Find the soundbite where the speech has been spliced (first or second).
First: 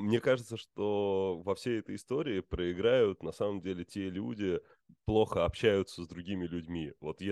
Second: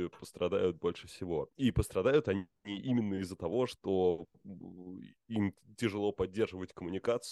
first